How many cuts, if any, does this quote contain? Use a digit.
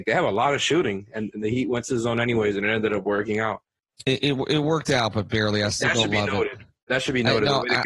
0